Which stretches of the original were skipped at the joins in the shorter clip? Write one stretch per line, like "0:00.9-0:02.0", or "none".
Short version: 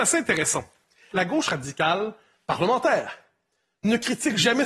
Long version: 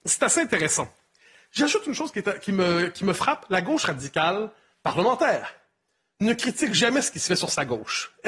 0:01.3-0:03.5